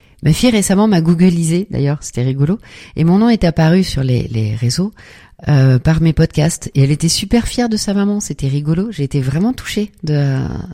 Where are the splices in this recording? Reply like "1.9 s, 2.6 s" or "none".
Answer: none